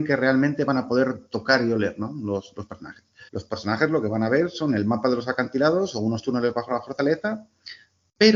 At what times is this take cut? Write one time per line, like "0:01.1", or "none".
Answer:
0:03.3